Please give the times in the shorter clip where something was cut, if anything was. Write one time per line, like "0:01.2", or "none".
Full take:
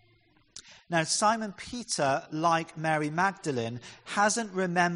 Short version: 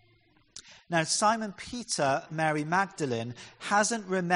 0:02.3